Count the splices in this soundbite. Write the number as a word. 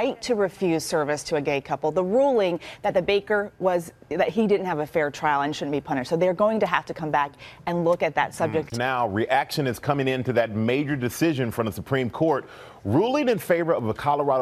one